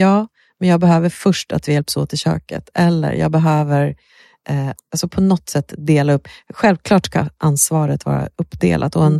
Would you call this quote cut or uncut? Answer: cut